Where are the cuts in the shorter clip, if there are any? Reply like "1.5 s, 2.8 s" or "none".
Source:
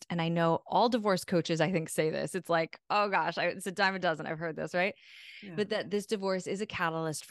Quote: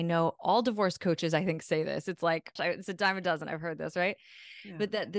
2.6 s